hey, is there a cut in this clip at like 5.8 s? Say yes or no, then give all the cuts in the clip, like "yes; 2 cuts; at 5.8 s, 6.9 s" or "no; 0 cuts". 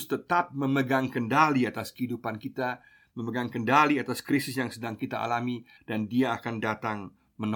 yes; 1 cut; at 5.8 s